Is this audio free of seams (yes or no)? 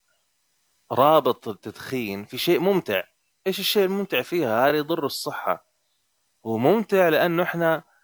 yes